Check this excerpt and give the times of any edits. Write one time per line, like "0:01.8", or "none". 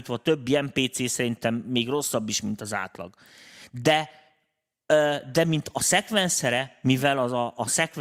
none